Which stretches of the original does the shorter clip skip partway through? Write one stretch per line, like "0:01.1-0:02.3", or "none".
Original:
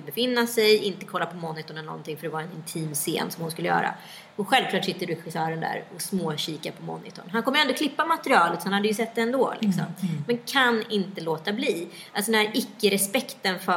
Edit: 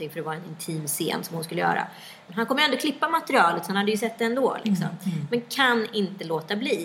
0:04.4-0:07.2